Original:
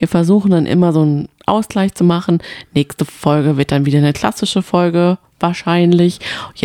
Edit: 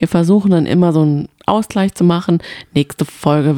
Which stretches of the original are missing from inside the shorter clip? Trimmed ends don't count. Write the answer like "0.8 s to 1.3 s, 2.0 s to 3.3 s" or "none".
none